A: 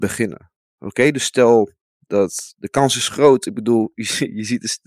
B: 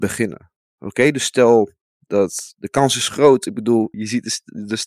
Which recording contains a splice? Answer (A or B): B